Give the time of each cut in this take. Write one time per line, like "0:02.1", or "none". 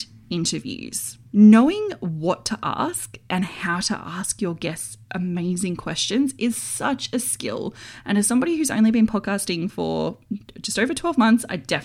0:01.3